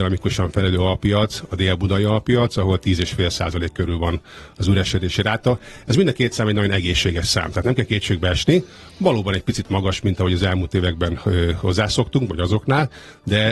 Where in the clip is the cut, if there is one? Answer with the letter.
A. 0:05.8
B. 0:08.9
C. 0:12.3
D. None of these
D